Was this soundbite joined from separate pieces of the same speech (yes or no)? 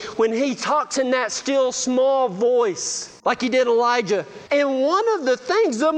yes